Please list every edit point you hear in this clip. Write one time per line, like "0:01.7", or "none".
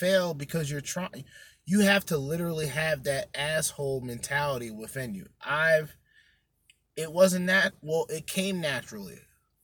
none